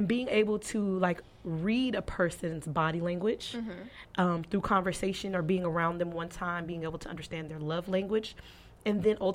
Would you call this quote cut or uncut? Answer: uncut